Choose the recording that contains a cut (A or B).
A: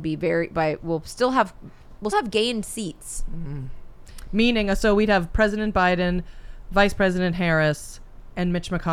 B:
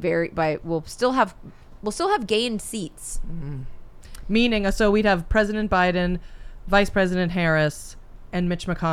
A